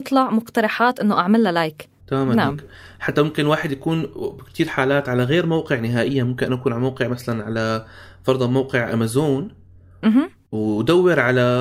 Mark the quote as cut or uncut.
cut